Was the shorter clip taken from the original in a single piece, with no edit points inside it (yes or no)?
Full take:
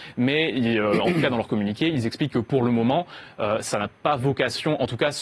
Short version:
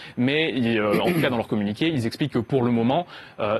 yes